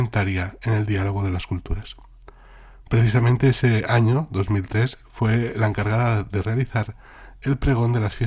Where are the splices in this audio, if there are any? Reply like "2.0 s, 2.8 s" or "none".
none